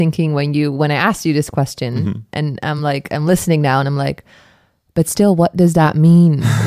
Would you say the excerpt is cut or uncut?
uncut